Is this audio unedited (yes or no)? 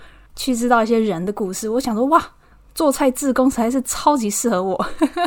yes